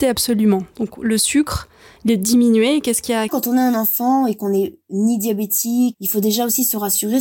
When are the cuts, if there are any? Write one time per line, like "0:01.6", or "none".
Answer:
0:03.3
0:05.9